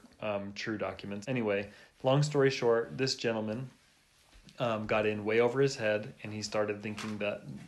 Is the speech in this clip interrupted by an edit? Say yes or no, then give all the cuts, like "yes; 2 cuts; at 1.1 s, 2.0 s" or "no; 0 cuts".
yes; 1 cut; at 1.2 s